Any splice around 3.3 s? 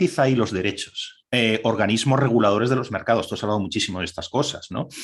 no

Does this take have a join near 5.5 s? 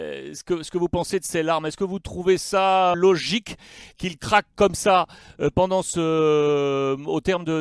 no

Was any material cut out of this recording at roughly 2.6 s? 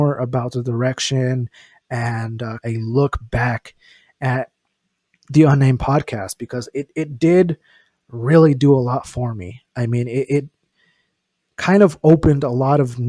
yes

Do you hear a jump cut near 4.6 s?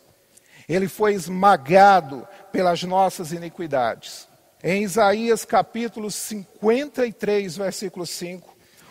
yes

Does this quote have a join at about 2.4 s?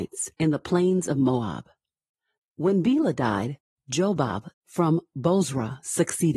yes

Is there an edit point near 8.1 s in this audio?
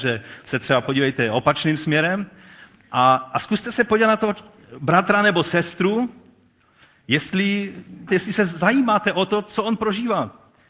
yes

